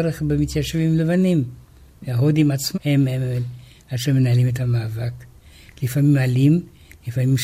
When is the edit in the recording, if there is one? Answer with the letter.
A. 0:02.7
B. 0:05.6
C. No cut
A